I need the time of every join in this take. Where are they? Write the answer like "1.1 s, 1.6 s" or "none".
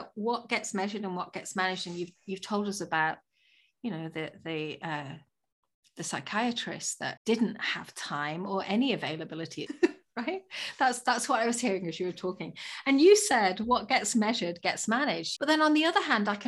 7.2 s, 9.7 s, 15.4 s